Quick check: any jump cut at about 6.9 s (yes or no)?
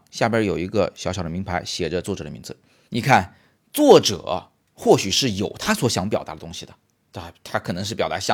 no